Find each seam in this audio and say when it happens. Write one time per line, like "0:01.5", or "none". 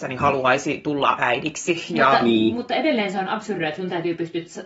none